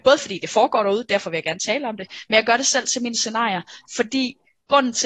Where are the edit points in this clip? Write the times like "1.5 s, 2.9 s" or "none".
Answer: none